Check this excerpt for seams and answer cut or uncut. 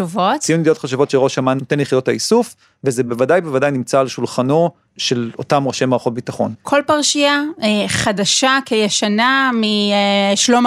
uncut